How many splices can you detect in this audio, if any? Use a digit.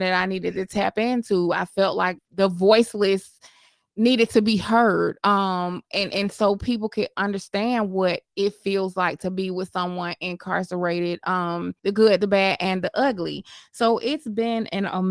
2